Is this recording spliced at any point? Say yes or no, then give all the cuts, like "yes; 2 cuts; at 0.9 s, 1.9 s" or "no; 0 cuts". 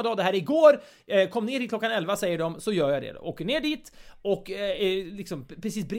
no; 0 cuts